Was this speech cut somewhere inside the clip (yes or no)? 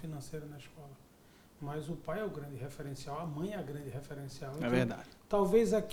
no